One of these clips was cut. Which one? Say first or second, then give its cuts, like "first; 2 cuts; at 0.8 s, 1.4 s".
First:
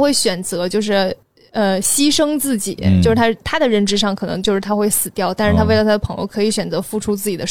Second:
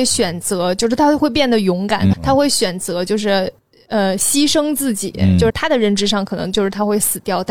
second; 2 cuts; at 2.1 s, 5.5 s